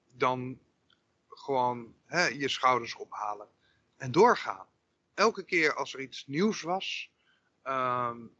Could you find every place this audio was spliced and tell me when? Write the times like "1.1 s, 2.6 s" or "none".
5.0 s

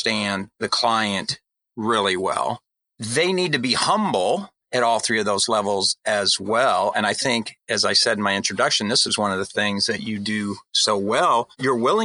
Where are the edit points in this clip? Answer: none

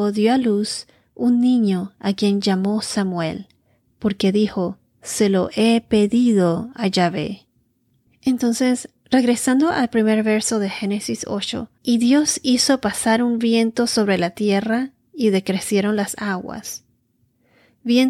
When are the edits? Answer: 8.1 s, 11.8 s

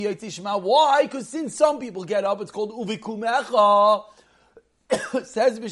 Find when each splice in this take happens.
none

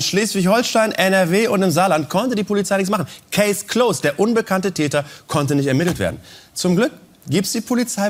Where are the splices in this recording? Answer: none

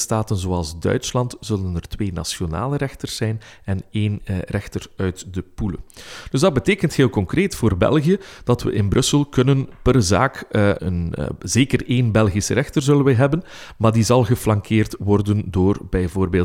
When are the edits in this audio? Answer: 10.8 s

